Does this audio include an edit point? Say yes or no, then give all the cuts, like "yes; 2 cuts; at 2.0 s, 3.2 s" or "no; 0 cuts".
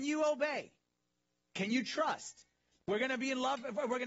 yes; 1 cut; at 2.8 s